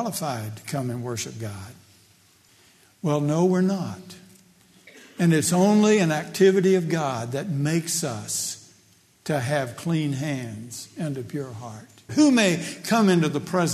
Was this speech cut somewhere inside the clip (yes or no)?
yes